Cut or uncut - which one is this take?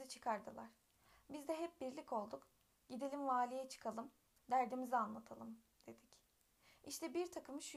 cut